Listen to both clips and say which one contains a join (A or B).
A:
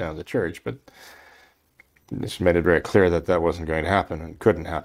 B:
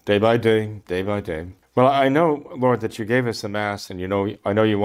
B